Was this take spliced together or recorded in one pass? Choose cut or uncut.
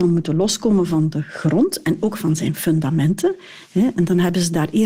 uncut